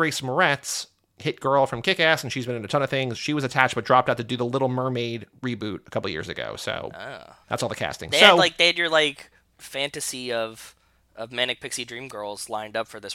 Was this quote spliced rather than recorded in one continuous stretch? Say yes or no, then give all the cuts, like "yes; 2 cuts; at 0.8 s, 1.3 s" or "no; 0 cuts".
no; 0 cuts